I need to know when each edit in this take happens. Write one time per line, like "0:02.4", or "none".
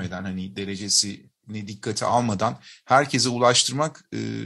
none